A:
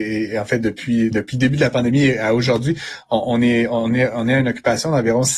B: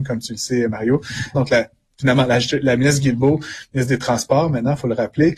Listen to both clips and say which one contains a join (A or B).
B